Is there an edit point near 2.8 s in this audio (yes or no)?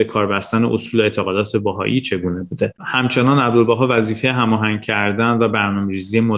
yes